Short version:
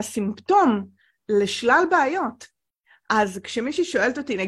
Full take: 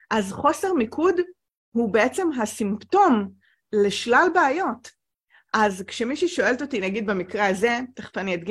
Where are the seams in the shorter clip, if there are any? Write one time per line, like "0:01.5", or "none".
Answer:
none